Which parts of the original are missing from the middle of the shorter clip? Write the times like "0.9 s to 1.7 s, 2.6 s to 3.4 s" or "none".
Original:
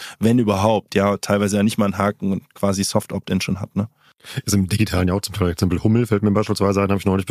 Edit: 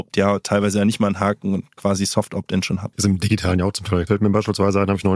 3.7 s to 4.4 s, 5.6 s to 6.1 s